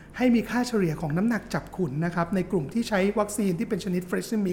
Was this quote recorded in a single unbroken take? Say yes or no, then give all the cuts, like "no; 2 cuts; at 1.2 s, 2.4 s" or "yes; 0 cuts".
yes; 0 cuts